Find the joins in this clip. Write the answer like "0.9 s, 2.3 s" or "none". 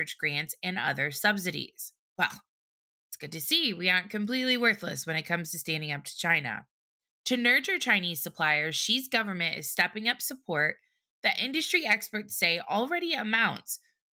7.1 s